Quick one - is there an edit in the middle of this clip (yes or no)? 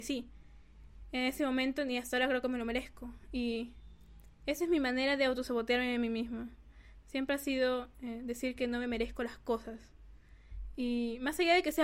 no